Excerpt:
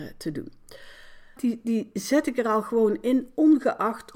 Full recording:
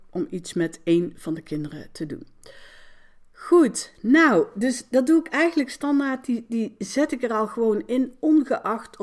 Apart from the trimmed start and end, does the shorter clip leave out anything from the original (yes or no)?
yes